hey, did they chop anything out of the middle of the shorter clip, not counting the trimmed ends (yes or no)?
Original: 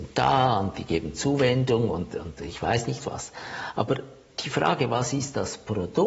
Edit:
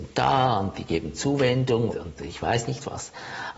yes